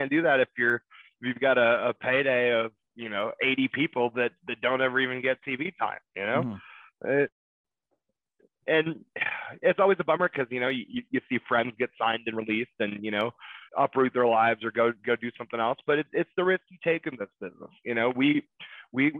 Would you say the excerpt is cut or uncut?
cut